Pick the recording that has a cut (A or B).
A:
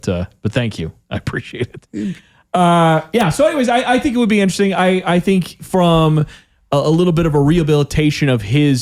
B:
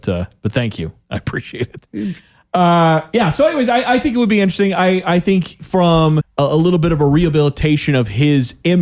B